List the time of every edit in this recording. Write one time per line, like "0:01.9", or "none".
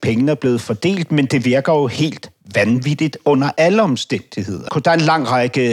0:04.7